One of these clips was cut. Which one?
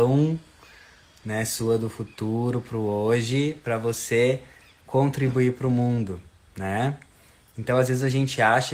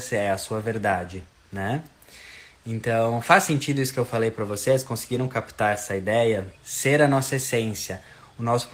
second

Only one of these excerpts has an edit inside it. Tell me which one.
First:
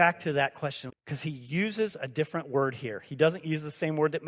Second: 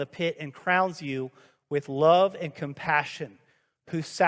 first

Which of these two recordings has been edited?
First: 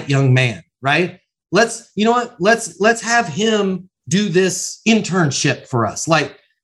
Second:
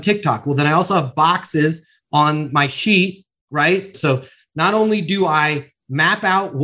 second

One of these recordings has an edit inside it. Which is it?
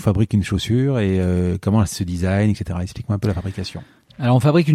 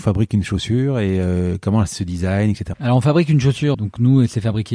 second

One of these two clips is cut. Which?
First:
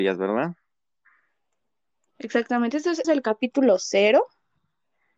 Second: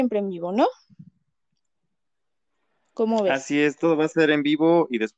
first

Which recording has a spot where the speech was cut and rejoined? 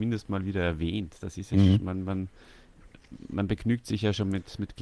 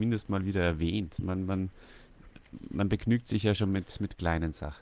second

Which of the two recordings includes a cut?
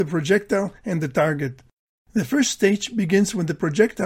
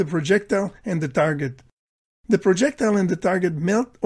first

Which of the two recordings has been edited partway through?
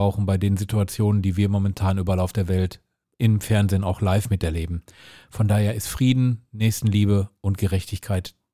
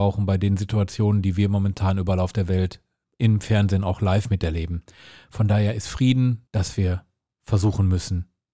second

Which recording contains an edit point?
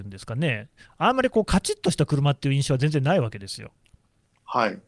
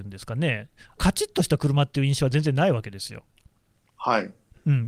second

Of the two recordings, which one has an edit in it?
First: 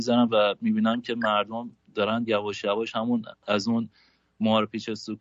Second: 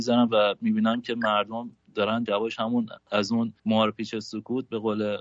second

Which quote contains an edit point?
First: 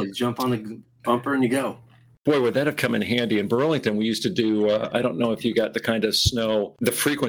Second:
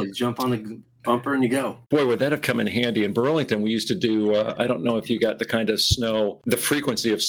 second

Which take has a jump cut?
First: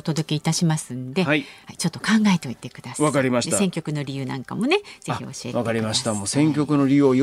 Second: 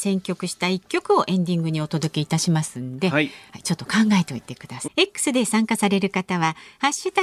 second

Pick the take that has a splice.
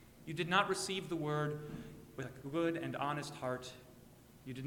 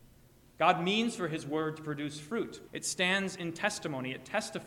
second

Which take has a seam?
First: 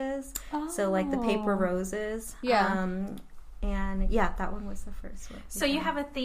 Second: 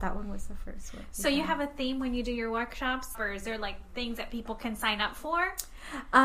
second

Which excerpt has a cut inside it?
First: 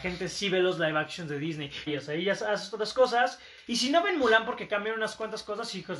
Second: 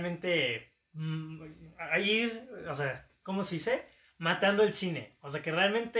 first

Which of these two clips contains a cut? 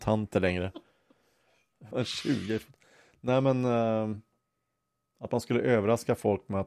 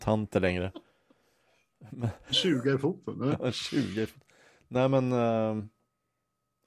first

